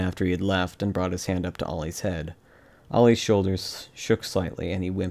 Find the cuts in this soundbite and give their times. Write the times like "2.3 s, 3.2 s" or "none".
none